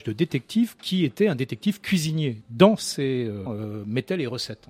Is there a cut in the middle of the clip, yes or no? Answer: yes